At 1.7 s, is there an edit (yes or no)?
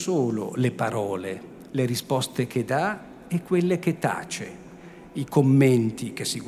yes